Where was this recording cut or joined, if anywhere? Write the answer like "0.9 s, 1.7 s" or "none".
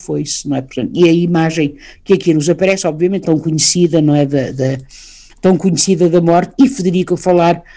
3.2 s